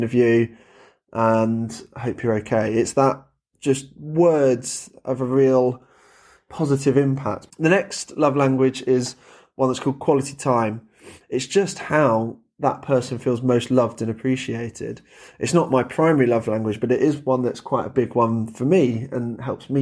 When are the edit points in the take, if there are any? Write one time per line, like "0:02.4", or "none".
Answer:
0:07.5
0:11.2